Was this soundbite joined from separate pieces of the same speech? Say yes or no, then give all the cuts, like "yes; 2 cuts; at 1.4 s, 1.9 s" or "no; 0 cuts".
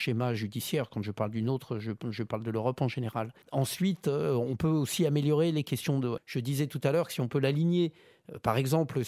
yes; 2 cuts; at 3.4 s, 6.2 s